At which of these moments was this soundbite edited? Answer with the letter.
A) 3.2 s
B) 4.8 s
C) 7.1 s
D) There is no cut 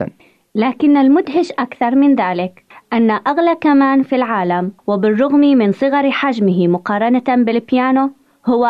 B